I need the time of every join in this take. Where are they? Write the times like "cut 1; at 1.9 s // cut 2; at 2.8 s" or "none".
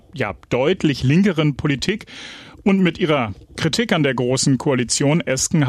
cut 1; at 3.5 s